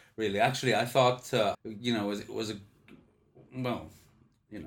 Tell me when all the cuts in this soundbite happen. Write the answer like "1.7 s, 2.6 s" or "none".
1.5 s